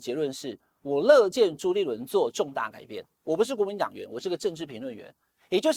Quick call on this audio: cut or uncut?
uncut